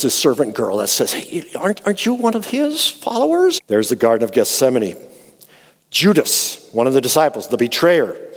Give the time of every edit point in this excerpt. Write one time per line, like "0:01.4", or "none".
0:03.6